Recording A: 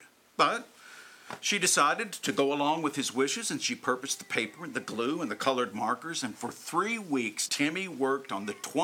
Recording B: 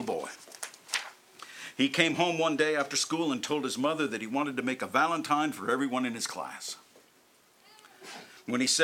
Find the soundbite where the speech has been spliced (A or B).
A